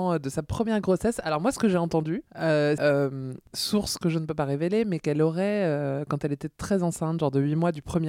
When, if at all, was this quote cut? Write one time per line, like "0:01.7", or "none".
0:02.8